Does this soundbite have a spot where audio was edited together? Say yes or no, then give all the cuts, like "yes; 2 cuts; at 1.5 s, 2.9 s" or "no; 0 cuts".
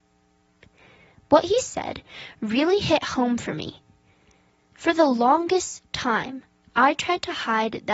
no; 0 cuts